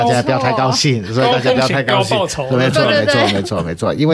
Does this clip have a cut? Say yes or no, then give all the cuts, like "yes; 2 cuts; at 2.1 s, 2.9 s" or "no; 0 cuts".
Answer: no; 0 cuts